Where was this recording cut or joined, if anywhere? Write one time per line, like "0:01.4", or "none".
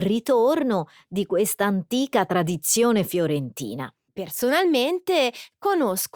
0:04.1

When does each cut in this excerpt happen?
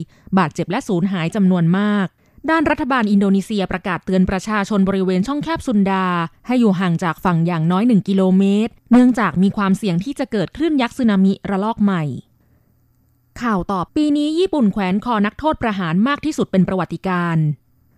0:13.9

